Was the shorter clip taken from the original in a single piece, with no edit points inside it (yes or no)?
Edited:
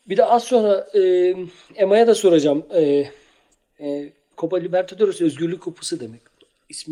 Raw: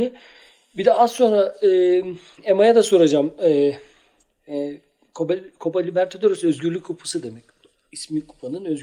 no